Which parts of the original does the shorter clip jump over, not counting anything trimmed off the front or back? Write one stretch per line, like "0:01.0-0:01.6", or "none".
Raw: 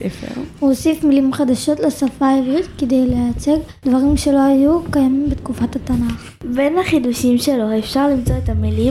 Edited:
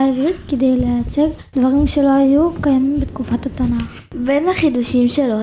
none